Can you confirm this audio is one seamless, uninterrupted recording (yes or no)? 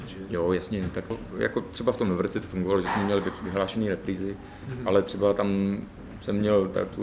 yes